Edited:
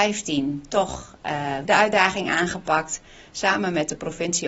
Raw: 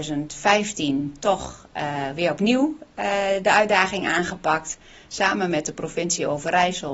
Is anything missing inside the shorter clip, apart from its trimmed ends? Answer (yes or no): yes